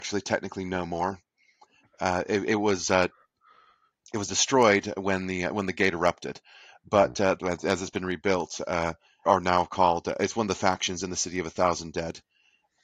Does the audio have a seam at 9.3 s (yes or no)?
yes